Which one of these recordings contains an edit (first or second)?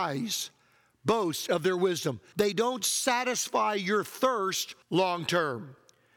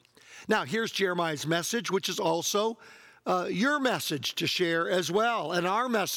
first